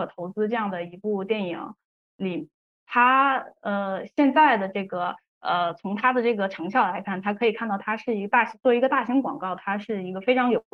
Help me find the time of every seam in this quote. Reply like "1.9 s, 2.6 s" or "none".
none